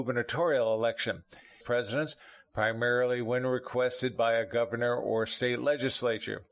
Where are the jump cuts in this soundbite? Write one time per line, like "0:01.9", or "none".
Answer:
0:01.6